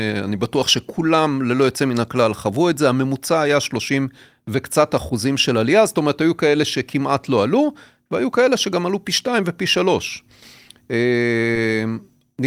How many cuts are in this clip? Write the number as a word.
zero